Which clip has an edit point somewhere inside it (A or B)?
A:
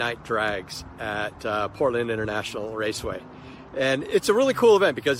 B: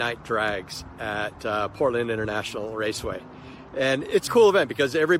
B